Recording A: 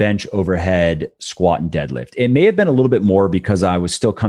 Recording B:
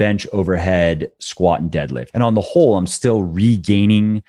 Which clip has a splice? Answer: B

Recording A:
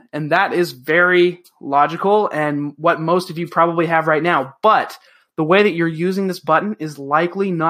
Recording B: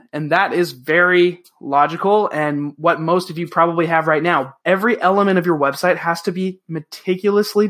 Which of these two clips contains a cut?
B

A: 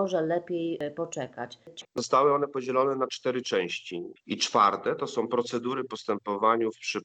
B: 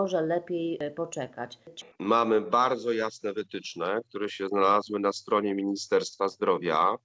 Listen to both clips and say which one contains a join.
A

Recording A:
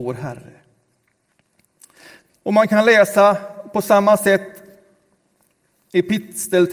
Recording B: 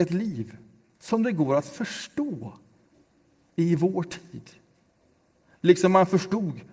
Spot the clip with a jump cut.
A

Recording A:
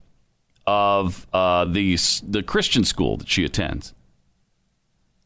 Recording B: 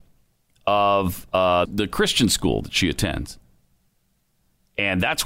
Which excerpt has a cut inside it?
B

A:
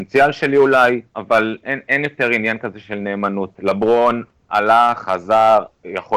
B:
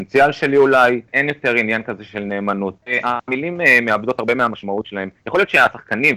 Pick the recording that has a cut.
B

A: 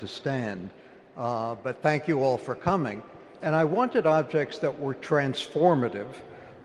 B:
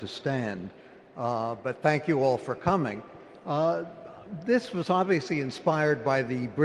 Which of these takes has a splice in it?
A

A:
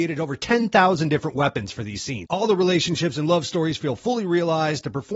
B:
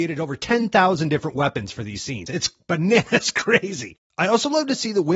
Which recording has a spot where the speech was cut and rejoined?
A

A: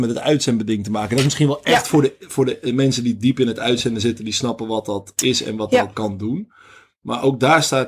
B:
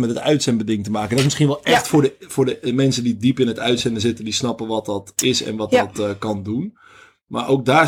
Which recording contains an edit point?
A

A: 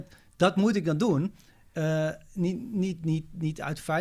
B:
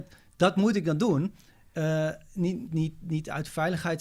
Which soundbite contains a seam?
B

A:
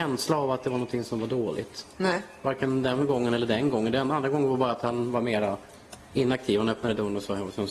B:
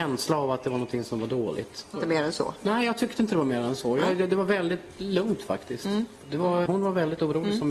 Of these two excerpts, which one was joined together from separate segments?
B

